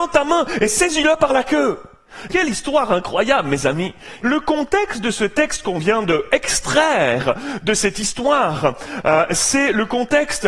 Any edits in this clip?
yes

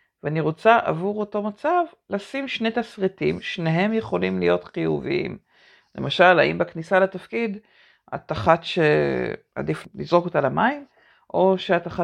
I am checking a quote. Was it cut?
no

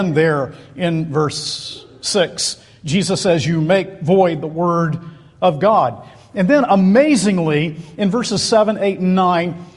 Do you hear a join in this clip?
no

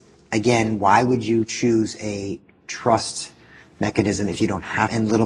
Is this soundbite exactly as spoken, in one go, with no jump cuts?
yes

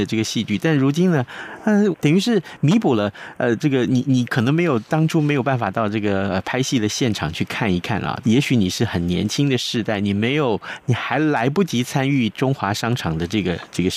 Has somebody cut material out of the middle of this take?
yes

